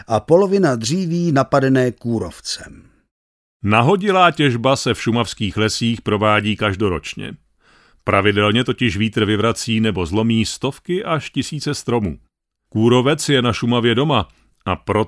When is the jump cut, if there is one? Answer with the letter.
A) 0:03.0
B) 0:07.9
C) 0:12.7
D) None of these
C